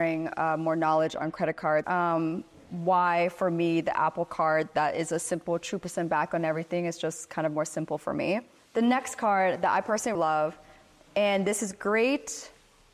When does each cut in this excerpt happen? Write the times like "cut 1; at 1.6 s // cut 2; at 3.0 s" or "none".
cut 1; at 1.8 s // cut 2; at 10.2 s